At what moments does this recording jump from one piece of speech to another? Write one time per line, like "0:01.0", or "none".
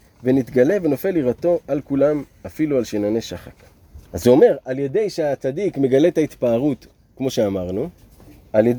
0:04.1